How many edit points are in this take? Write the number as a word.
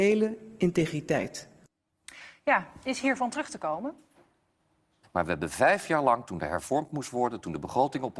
two